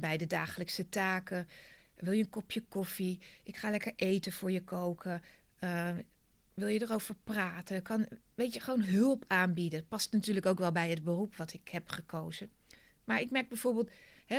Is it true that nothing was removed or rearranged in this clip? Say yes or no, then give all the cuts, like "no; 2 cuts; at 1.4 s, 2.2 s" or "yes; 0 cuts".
no; 1 cut; at 1.8 s